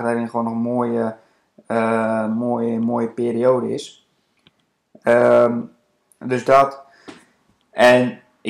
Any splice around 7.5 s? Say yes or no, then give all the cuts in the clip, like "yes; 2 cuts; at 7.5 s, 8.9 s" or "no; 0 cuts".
no; 0 cuts